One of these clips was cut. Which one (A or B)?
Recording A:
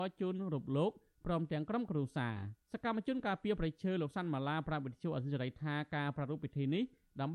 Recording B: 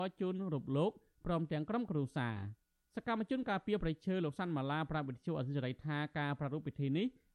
A